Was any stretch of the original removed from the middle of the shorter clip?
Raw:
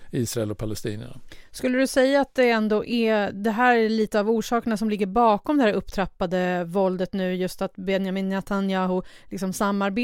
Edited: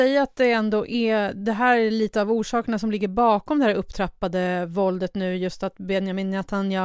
no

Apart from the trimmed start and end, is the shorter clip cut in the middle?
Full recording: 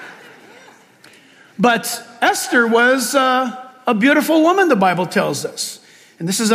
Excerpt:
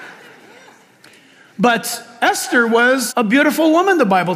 yes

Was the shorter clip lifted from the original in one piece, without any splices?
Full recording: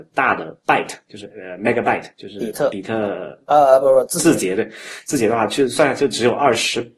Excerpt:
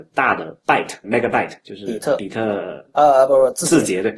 no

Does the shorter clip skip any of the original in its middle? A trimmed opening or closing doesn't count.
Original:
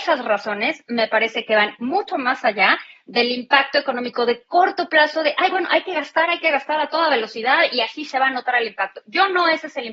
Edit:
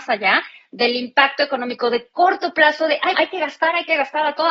yes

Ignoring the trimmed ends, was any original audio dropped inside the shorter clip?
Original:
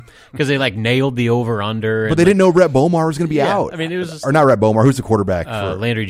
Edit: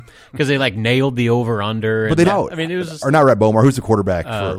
yes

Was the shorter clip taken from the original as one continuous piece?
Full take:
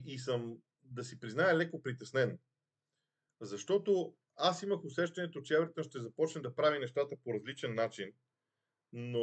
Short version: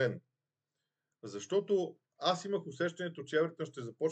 yes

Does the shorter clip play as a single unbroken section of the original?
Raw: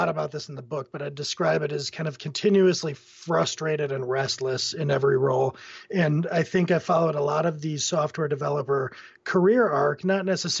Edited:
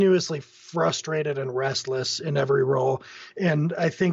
yes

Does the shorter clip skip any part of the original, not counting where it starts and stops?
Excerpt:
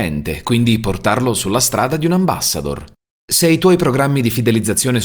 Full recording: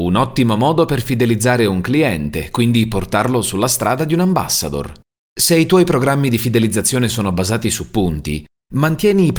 no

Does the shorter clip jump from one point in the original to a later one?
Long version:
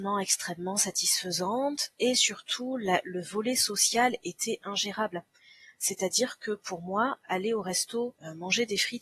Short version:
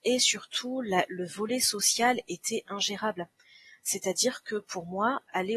no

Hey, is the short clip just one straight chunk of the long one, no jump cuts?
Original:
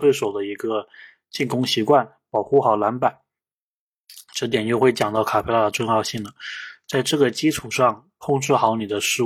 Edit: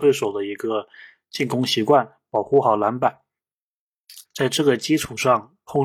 no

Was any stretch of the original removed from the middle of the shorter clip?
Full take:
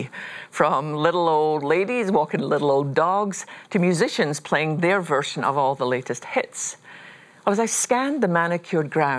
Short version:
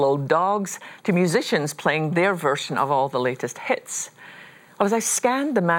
no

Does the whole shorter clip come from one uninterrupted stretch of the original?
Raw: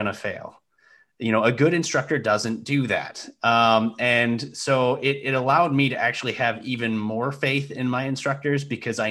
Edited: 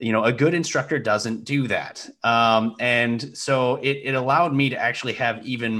yes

